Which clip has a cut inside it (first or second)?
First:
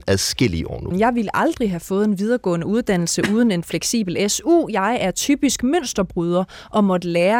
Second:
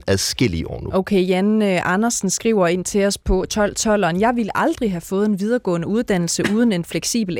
first